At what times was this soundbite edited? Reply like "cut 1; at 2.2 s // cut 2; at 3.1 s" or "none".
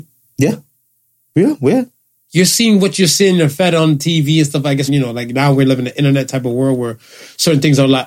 cut 1; at 1.3 s // cut 2; at 4.9 s